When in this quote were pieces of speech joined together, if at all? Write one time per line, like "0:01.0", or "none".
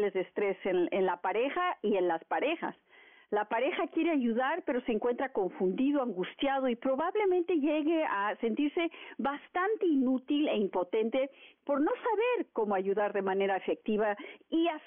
none

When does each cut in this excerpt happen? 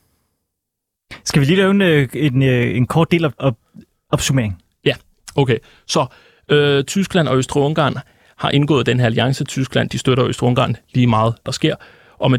0:03.4
0:11.4

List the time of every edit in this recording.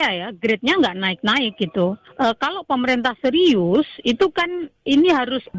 none

